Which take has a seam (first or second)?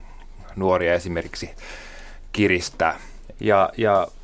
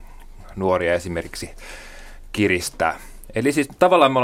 first